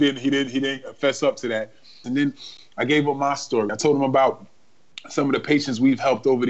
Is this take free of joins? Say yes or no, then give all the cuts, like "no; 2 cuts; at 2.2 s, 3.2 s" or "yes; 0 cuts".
no; 2 cuts; at 2.0 s, 3.7 s